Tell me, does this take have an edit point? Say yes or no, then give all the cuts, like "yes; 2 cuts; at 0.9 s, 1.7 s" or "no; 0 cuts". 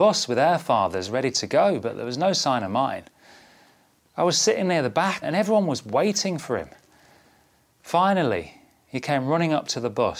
yes; 1 cut; at 5.2 s